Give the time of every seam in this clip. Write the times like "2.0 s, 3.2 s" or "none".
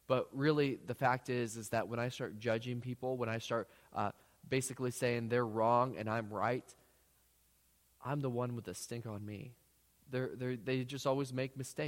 10.0 s